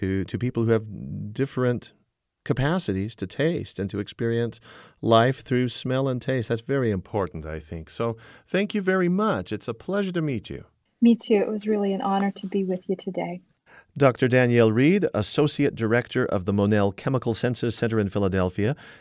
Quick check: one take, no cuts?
yes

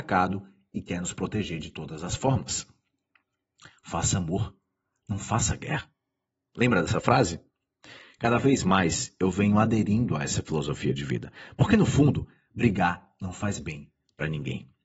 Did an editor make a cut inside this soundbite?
no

